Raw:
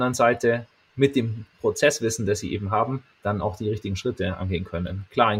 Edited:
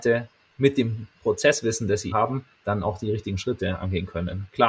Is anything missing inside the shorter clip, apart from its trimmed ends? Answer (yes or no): yes